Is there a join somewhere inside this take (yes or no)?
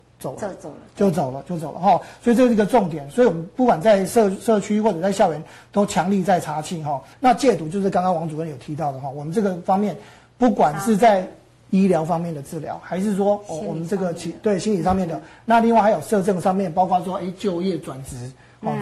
yes